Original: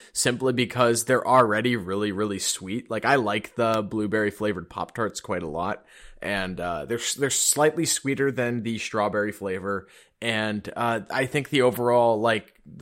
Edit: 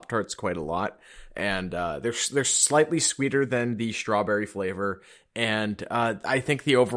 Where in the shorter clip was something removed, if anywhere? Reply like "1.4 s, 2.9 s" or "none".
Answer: none

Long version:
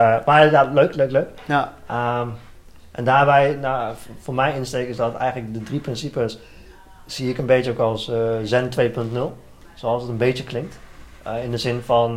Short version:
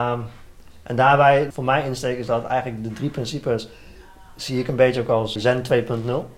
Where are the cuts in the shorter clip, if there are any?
1.5 s, 5.4 s

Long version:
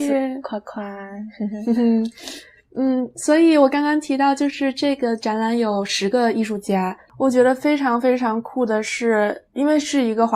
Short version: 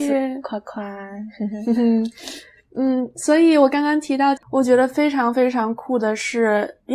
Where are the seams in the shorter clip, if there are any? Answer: 4.4 s

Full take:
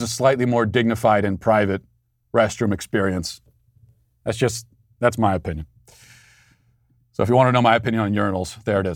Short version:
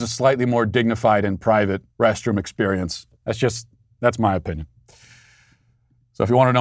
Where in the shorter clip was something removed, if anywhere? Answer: 1.9 s, 3.2 s

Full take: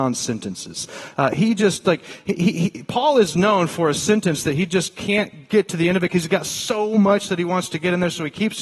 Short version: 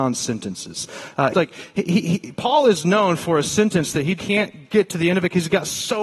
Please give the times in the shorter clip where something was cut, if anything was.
1.3 s, 4.2 s

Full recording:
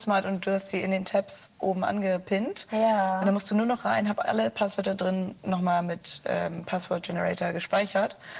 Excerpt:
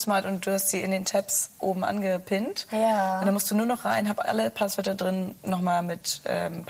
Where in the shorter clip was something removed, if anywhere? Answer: none

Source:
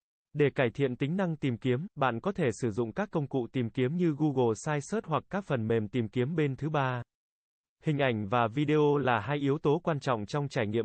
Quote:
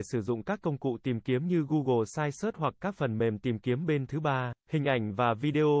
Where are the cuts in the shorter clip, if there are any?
4.6 s

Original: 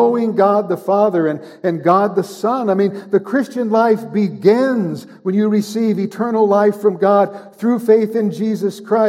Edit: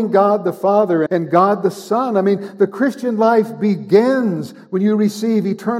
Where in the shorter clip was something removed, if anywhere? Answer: 1.1 s

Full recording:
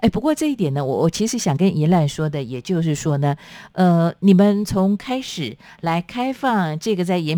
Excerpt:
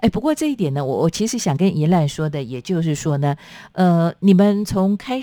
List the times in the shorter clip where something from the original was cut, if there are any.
none

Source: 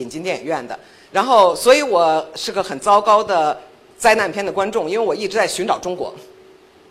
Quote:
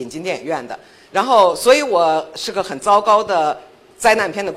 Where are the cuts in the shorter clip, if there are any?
none

